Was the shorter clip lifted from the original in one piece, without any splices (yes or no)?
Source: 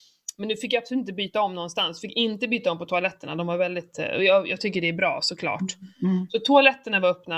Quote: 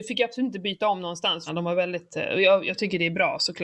no